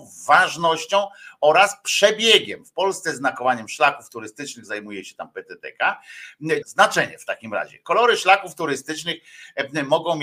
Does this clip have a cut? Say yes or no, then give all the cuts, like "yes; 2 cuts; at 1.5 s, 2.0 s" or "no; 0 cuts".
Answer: yes; 1 cut; at 6.6 s